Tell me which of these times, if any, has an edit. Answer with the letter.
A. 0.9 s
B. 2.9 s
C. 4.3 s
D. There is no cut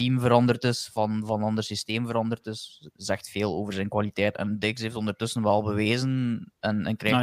C